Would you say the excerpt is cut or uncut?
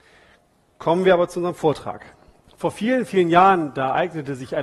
uncut